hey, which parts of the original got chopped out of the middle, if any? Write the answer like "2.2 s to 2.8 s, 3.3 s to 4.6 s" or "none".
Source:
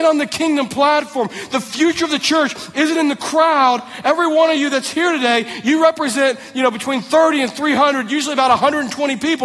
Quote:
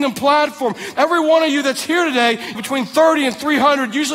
1.5 s to 4.0 s, 5.6 s to 6.7 s